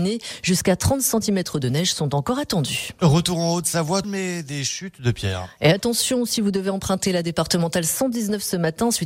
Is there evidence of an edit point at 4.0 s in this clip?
yes; 1 cut; at 4.0 s

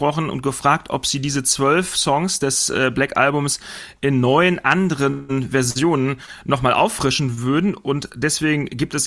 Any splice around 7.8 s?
no; 0 cuts

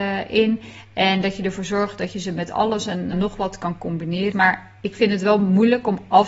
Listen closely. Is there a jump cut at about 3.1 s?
yes; 2 cuts; at 3.1 s, 4.3 s

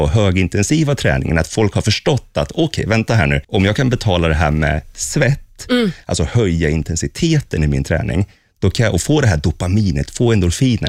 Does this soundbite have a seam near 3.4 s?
yes; 1 cut; at 3.4 s

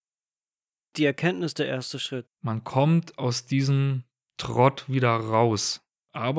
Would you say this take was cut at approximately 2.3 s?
yes; 1 cut; at 2.3 s

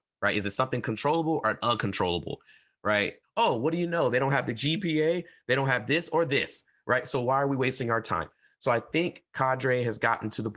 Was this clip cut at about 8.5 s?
no; 1 cut; at 3.2 s

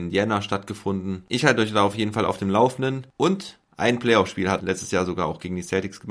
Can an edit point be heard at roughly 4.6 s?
yes; 2 cuts; at 3.2 s, 4.6 s

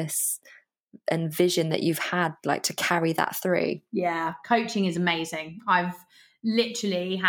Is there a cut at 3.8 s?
no; 0 cuts

